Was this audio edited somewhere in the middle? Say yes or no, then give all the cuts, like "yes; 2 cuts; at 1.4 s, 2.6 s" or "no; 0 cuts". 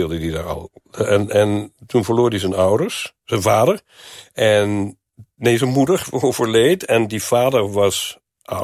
no; 0 cuts